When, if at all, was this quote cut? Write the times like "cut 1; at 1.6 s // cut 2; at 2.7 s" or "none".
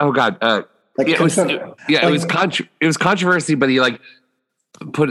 cut 1; at 1.8 s